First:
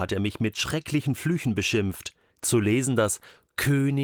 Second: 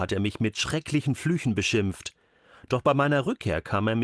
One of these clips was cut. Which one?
first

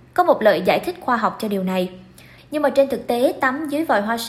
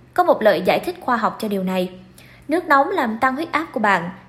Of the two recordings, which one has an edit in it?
first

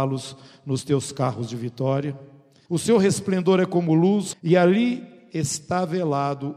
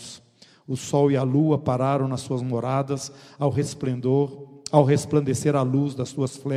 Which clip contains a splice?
first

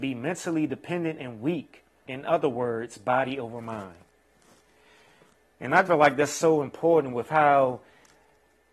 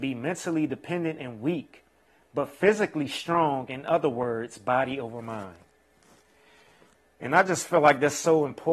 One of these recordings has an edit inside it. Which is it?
first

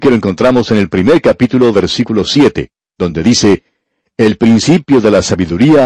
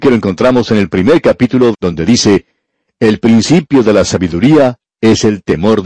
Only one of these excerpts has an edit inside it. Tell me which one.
second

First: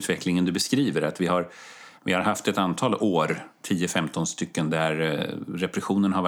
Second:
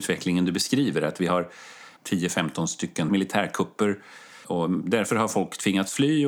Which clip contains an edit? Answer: second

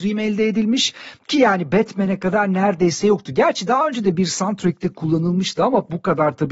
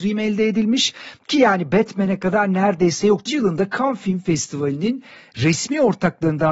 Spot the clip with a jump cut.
second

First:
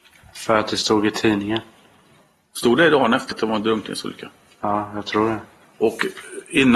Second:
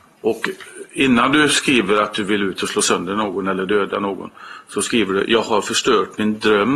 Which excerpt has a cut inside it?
first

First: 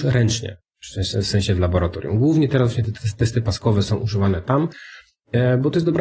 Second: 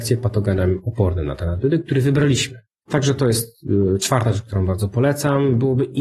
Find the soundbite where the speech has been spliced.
second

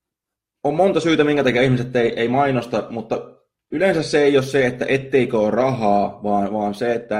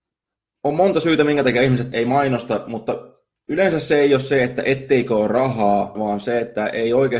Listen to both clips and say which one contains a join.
second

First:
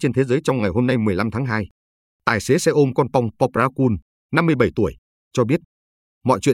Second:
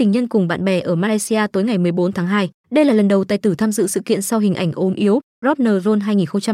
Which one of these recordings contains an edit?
second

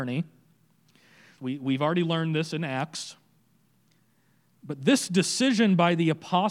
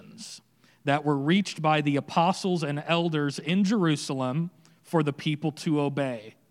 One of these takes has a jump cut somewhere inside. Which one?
first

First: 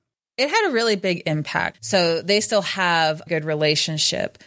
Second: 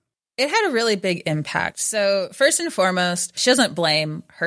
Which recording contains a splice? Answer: first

